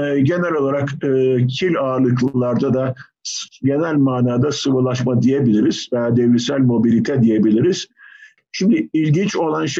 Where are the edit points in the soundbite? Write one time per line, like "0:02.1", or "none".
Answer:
0:08.4